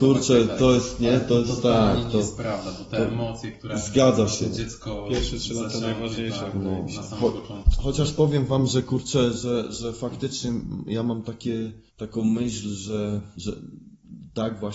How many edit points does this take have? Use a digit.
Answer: 2